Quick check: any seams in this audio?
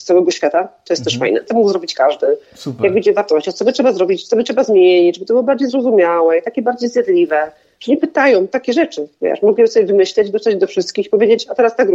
yes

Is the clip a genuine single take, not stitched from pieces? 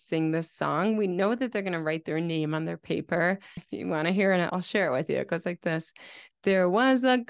no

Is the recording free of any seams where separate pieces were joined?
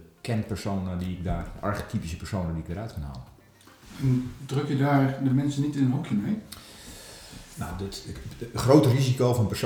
no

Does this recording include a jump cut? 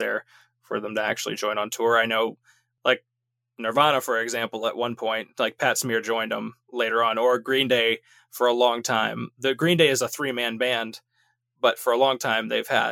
no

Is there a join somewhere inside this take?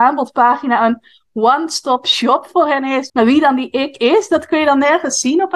yes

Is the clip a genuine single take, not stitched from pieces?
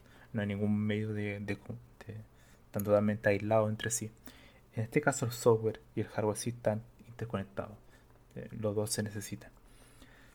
yes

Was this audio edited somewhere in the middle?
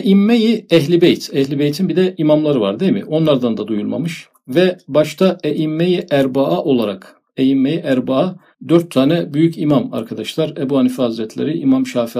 no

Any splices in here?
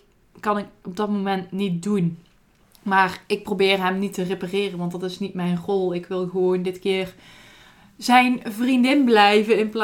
no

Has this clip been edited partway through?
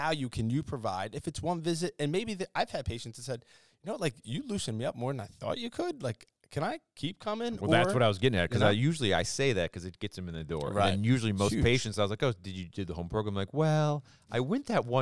no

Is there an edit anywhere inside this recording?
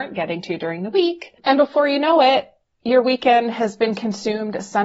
no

